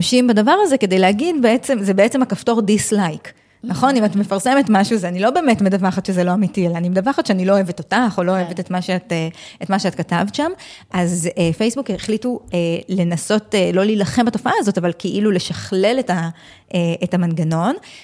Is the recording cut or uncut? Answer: uncut